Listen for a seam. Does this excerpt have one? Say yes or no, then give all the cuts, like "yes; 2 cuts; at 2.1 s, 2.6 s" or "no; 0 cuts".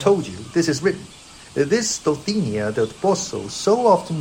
no; 0 cuts